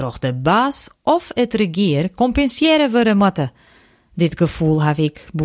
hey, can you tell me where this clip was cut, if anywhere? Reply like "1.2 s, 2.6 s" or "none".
none

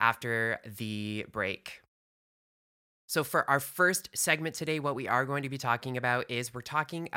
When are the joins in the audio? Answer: none

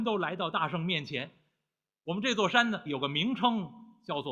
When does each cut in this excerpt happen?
2.9 s

